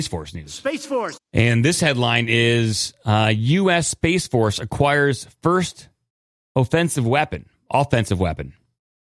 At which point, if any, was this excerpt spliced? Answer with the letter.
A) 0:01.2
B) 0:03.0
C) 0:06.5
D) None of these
A